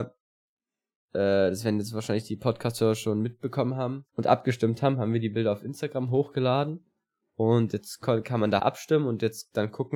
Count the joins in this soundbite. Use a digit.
2